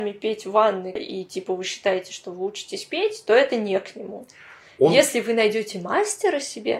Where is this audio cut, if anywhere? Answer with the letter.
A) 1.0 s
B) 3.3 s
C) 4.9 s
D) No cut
A